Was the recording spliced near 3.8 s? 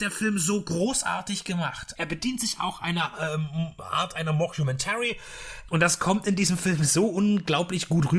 yes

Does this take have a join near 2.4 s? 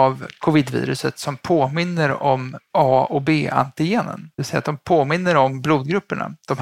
no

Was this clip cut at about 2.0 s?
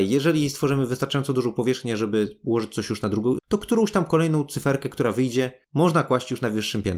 no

